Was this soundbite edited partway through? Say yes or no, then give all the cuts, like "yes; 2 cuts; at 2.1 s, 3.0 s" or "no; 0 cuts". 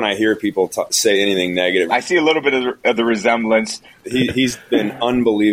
yes; 2 cuts; at 1.9 s, 4.0 s